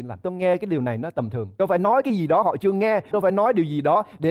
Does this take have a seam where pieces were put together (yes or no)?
yes